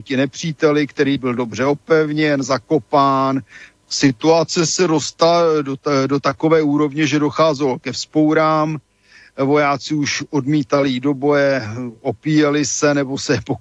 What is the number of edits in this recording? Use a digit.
1